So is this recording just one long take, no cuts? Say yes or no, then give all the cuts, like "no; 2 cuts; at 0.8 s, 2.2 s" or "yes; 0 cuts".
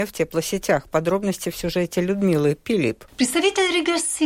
no; 1 cut; at 3.1 s